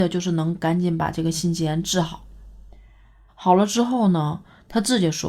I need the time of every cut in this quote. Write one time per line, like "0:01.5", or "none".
0:03.3